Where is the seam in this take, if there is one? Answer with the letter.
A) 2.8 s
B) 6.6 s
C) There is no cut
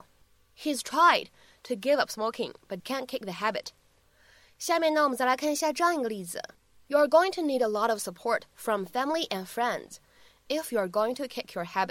A